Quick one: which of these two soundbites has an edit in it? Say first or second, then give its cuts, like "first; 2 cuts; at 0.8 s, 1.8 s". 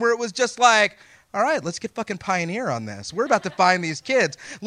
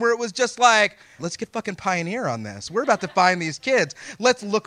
second; 1 cut; at 1.2 s